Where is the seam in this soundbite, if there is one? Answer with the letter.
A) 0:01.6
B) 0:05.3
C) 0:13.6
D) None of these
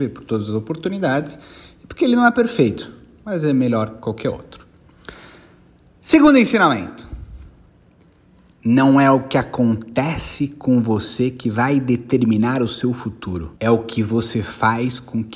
C